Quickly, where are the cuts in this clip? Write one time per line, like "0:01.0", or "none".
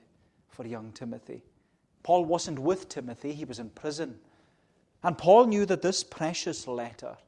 0:01.8
0:05.0